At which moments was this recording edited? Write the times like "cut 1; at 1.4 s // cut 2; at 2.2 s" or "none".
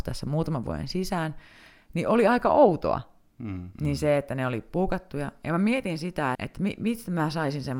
cut 1; at 3.7 s // cut 2; at 6.4 s